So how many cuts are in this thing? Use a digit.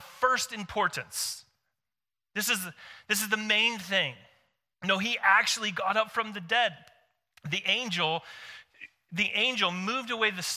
1